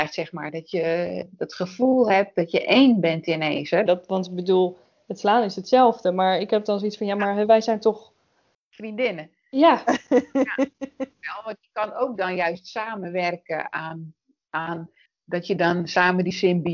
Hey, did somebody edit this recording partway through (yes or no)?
yes